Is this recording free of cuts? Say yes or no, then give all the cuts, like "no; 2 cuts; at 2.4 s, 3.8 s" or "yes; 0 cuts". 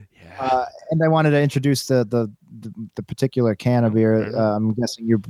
yes; 0 cuts